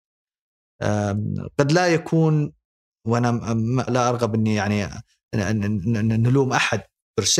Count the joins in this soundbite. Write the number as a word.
one